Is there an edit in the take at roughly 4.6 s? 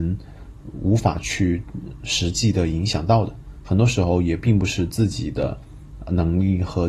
no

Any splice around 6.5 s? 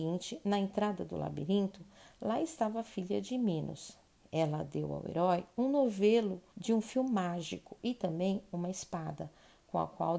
yes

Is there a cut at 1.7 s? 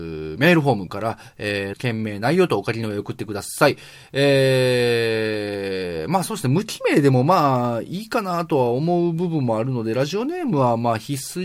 yes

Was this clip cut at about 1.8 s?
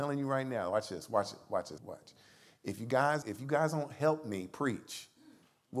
yes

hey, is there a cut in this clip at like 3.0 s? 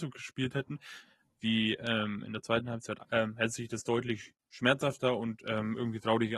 yes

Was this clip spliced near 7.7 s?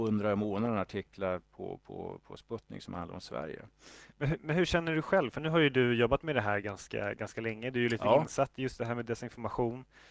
no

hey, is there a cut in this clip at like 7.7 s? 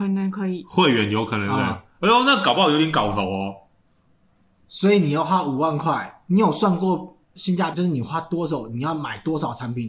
yes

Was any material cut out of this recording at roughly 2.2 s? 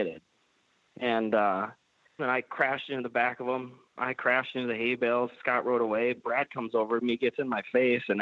yes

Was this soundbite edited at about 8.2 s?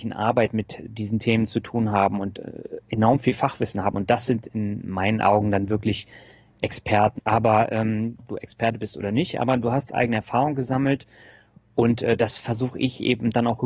yes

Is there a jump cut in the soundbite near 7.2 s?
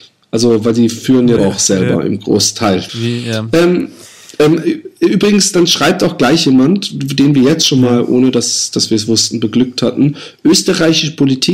no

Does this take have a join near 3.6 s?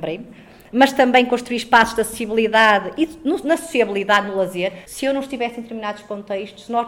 no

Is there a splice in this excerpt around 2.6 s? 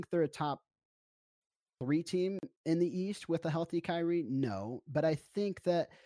yes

